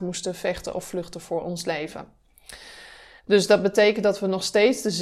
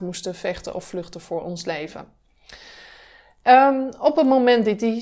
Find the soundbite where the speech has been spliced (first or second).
first